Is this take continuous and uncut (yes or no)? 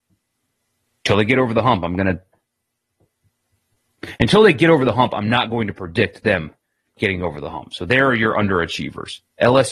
yes